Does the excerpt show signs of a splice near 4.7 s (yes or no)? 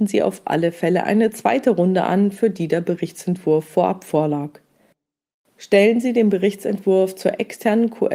no